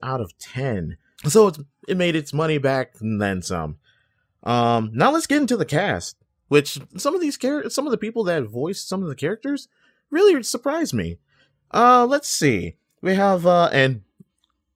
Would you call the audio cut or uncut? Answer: cut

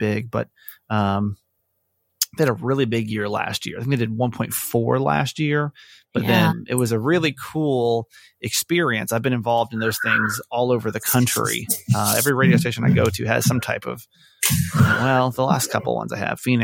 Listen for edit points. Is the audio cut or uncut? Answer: cut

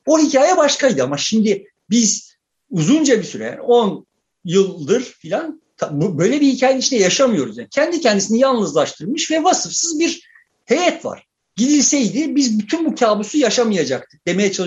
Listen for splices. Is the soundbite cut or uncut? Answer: cut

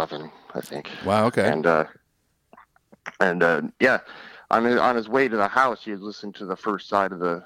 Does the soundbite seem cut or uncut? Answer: uncut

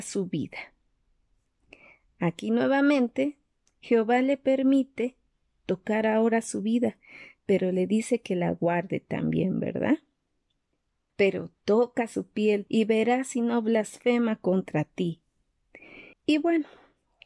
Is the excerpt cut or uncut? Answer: cut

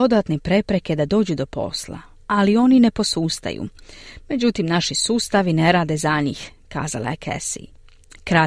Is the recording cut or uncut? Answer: uncut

